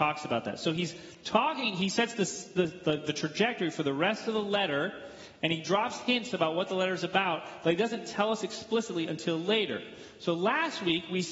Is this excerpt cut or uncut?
uncut